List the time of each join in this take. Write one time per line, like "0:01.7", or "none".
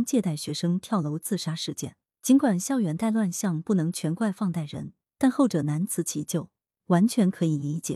0:06.8